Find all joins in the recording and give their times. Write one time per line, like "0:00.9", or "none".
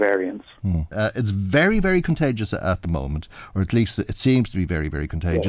0:00.9

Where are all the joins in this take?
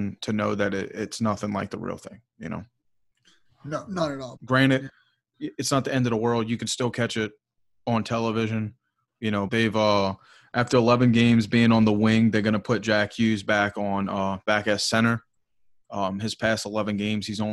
0:04.4
0:09.5

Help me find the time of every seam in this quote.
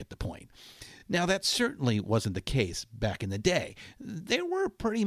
none

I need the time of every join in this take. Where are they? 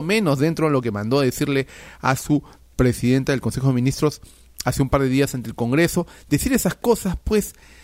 none

